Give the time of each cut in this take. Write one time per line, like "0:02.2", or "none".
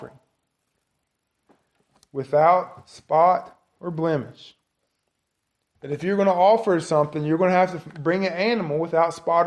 0:05.7